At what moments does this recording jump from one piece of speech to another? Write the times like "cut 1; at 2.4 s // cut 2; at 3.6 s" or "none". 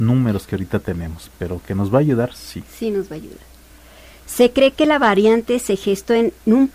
none